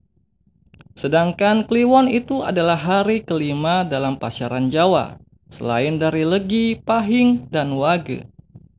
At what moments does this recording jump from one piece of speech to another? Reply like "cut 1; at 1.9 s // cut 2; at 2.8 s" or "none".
cut 1; at 7.5 s